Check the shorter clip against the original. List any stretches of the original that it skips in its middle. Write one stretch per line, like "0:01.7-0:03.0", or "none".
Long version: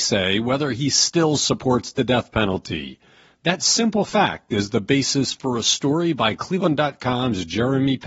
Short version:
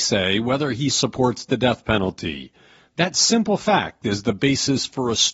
0:00.9-0:01.4

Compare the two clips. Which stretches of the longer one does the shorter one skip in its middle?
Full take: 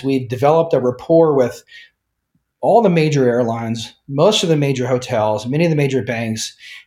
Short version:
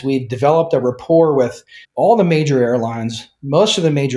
0:01.8-0:02.5

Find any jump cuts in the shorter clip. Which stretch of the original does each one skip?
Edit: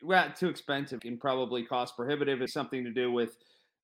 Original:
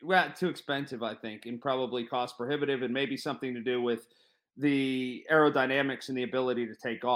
0:01.0-0:01.4
0:02.9-0:03.2

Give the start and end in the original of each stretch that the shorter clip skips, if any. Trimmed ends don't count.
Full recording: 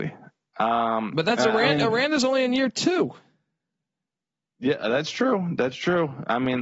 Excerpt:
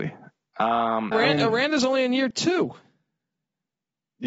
0:01.1-0:01.5

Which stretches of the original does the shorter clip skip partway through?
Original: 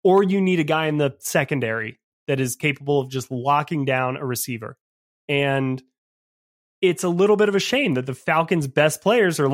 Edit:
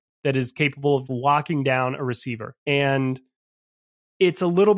0:03.1-0:03.3
0:04.8-0:05.2

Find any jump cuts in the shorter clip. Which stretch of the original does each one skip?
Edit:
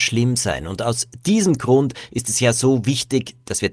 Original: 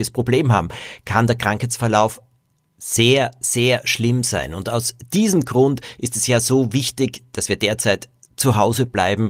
none

